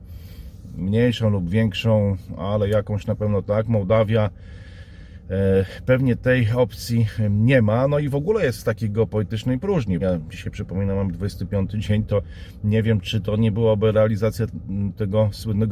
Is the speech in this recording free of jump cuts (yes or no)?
no